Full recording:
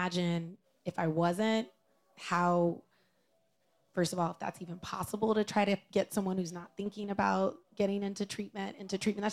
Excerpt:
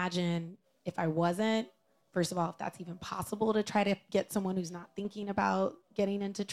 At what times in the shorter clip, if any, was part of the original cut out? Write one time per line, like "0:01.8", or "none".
0:02.0